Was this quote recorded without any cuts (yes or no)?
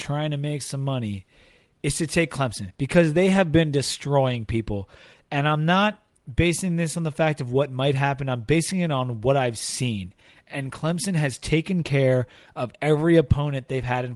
yes